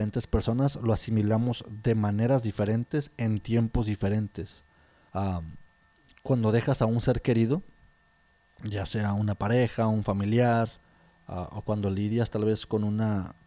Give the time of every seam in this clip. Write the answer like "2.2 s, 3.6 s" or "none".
5.1 s

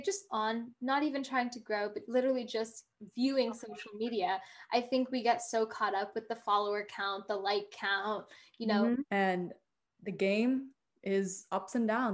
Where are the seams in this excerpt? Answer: 9.0 s

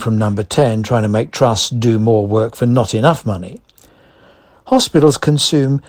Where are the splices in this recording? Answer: none

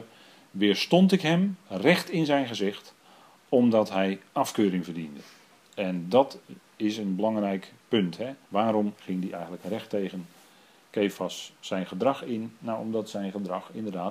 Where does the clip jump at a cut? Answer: 8.5 s

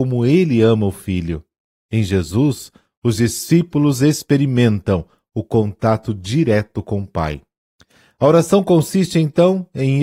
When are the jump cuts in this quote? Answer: none

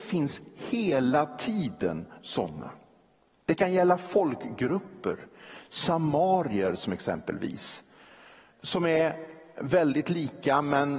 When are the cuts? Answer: 8.5 s

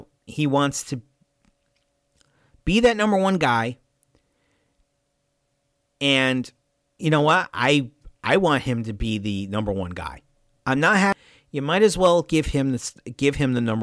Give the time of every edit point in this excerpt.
10.6 s

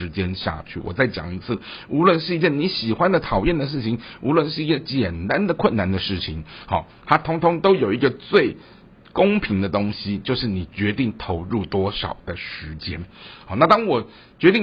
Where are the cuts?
none

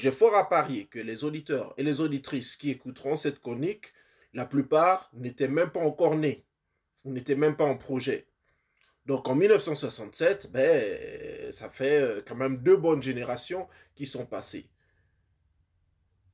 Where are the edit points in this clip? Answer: none

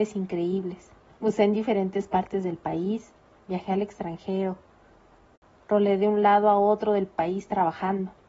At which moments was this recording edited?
1.1 s

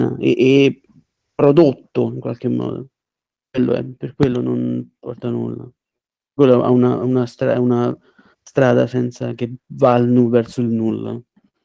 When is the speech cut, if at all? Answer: none

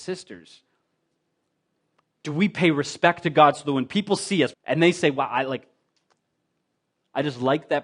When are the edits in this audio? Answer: 2.1 s, 4.5 s

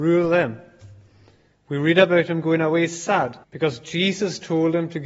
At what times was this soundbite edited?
1.5 s, 3.4 s

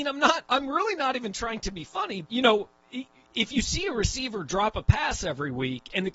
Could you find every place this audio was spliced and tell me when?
2.2 s

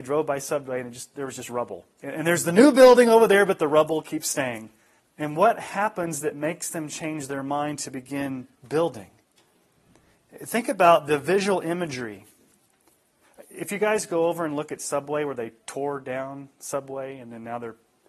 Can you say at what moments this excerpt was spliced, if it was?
1.9 s, 5.0 s, 8.6 s

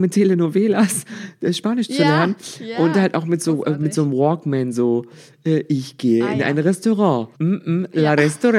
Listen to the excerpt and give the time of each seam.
7.3 s

